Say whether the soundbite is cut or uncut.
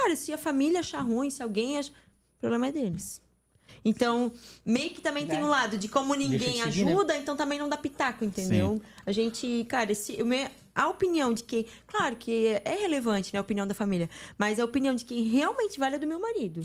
uncut